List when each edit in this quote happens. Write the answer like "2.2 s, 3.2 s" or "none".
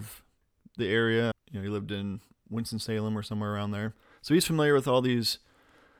1.3 s